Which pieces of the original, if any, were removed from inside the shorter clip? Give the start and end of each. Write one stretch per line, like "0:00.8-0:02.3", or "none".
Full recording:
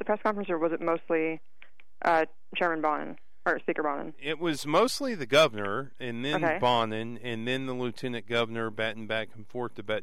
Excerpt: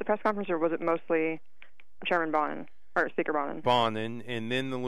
0:02.0-0:02.5
0:04.1-0:06.6